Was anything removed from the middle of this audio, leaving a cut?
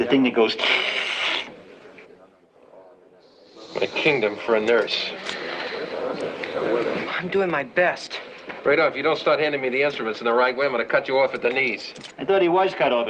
no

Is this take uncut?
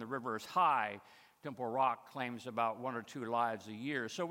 yes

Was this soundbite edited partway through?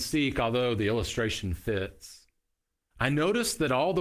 yes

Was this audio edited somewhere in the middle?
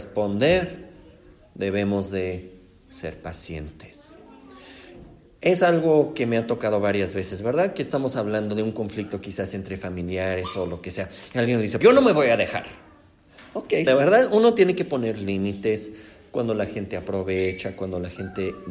yes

